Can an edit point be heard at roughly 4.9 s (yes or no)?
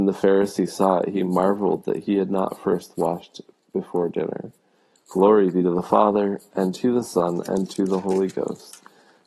yes